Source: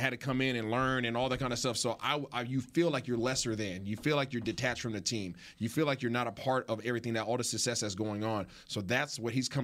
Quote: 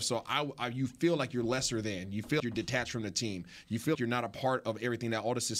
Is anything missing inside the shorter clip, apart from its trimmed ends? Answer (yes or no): yes